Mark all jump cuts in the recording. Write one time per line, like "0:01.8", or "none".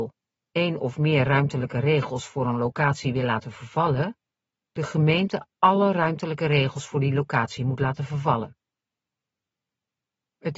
none